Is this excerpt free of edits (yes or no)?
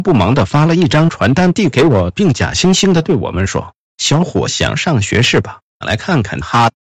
no